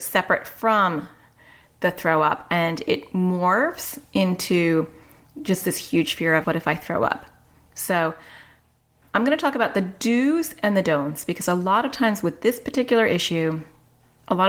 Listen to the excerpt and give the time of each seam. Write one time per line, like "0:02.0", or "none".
0:06.4